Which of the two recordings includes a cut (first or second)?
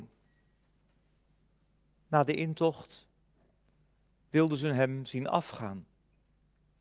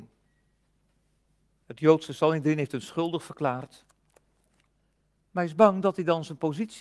second